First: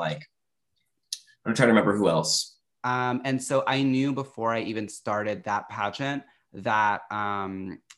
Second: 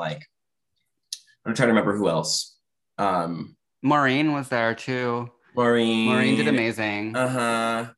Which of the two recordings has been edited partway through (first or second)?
first